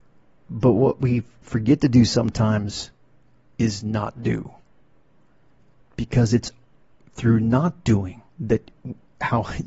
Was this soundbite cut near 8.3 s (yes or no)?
yes